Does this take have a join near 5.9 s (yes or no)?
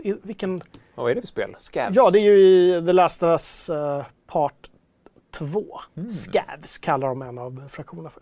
yes